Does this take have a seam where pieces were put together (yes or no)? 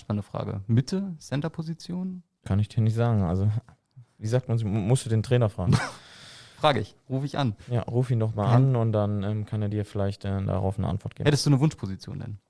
no